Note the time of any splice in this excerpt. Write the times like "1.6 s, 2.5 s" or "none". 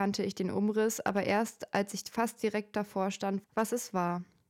3.4 s

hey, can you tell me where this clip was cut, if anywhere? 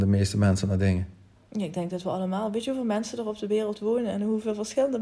none

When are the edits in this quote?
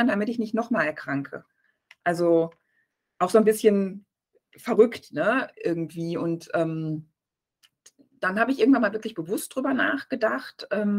none

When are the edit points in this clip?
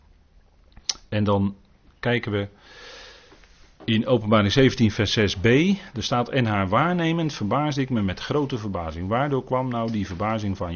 none

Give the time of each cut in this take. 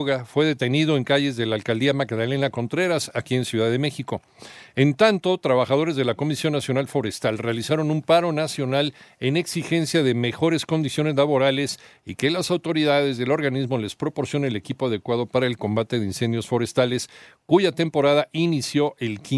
none

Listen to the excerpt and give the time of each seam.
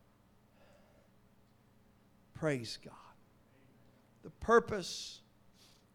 none

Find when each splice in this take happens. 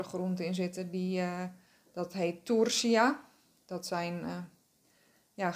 none

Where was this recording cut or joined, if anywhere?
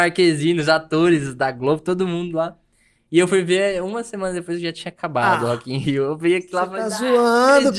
none

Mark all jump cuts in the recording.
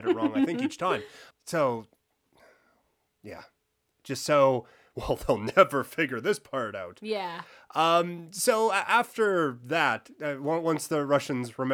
1.3 s

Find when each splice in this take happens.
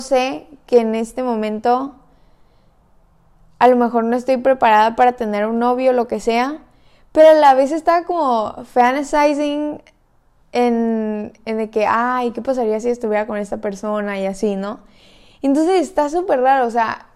none

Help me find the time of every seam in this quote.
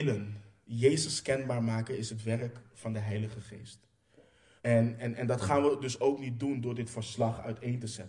4.6 s

